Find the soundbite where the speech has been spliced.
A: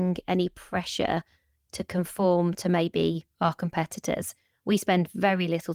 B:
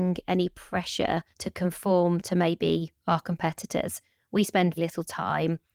B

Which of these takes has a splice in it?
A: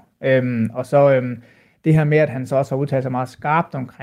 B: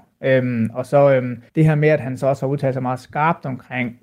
B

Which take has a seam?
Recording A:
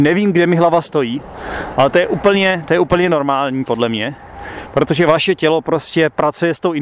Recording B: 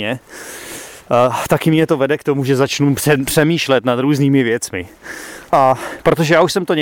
B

